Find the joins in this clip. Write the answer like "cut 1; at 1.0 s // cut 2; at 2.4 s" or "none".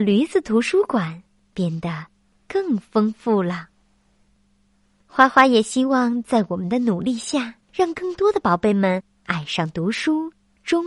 cut 1; at 1.5 s // cut 2; at 7.6 s